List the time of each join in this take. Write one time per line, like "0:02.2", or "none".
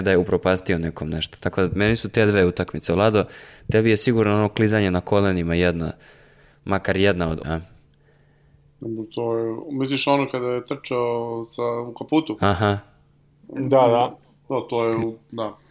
0:07.4